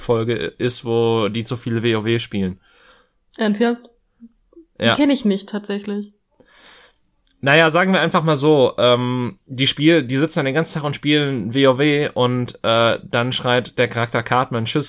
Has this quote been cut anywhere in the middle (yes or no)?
no